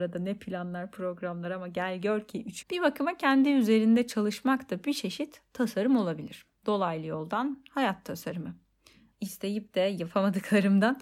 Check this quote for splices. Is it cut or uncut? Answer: cut